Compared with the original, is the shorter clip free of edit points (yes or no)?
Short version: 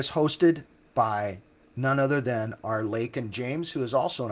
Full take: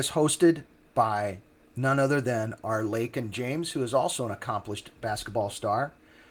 yes